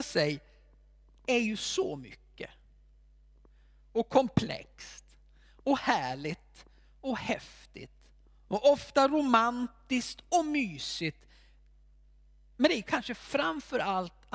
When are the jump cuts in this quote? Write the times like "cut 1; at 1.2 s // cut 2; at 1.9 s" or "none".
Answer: none